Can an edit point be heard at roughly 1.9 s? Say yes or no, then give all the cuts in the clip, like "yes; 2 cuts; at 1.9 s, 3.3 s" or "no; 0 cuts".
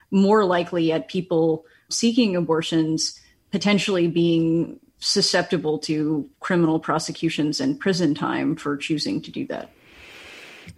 yes; 1 cut; at 1.9 s